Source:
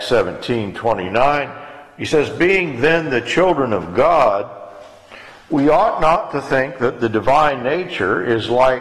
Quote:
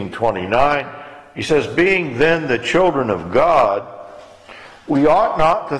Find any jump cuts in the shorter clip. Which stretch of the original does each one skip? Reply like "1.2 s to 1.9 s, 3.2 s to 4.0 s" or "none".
none